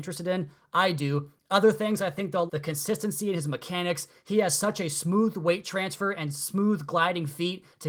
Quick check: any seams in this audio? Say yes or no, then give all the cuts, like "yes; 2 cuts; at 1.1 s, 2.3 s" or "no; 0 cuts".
yes; 1 cut; at 2.5 s